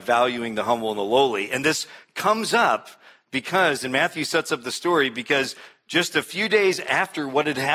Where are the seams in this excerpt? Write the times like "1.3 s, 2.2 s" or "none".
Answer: none